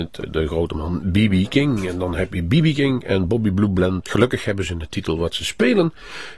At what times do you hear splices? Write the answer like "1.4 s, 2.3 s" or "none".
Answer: 4.0 s